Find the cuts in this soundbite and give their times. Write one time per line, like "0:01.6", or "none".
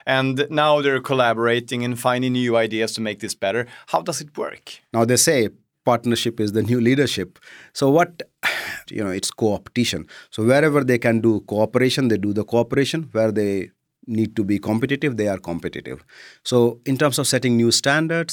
0:04.9
0:08.9